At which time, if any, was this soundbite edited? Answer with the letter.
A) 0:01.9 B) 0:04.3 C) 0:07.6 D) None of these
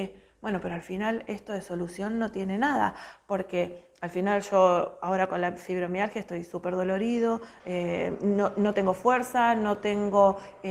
C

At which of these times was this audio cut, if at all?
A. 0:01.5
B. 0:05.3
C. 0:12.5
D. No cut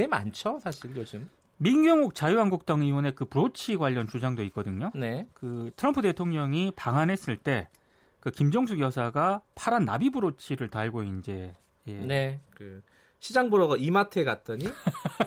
C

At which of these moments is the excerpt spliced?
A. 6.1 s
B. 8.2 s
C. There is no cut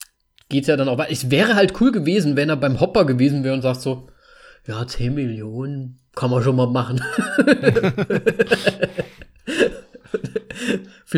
A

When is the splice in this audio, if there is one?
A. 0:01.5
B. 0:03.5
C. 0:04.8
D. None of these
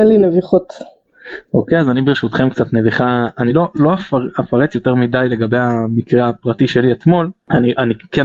D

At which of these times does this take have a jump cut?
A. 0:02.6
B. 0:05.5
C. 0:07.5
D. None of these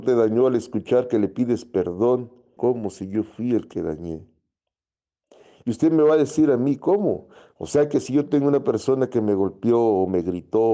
A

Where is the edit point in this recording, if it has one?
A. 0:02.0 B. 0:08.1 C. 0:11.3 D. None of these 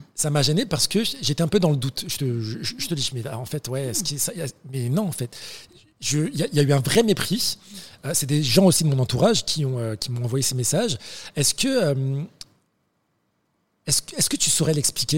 D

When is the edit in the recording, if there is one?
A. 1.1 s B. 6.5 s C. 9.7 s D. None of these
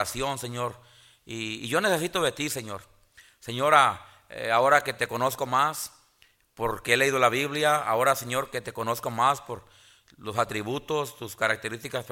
D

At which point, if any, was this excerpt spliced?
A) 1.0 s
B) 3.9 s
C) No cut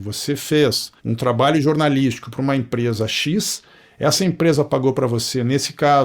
A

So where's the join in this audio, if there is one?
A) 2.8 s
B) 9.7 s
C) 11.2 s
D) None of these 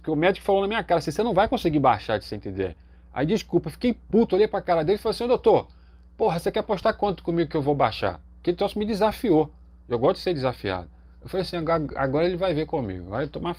D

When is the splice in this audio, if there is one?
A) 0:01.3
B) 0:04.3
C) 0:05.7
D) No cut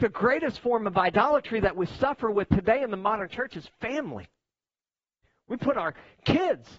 D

